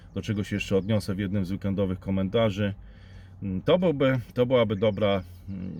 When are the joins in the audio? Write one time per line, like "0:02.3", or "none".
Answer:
none